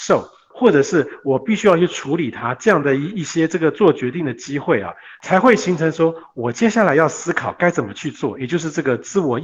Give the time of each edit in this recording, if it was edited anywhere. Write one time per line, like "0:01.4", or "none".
none